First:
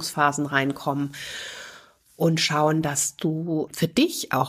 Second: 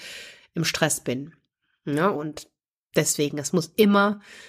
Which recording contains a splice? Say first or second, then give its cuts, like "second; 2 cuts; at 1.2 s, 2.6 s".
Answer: second; 1 cut; at 2.1 s